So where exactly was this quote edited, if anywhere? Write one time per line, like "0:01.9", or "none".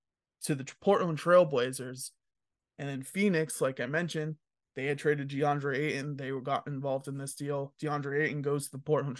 none